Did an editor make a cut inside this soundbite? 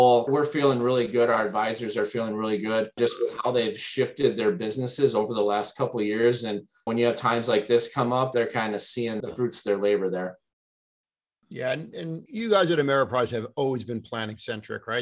no; 0 cuts

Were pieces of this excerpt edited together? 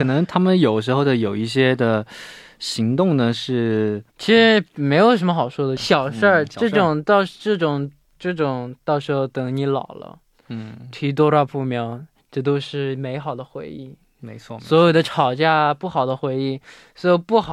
yes; 1 cut; at 5.8 s

